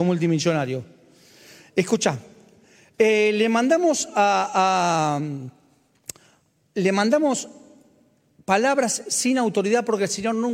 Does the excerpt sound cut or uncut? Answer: uncut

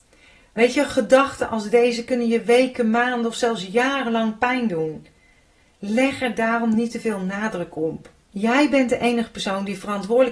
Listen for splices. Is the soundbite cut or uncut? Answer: cut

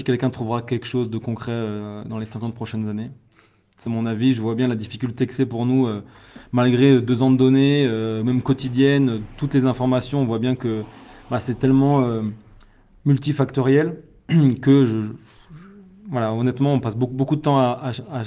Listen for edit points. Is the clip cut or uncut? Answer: cut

